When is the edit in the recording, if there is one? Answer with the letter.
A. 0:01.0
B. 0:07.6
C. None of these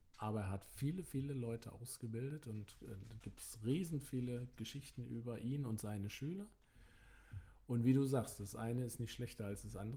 C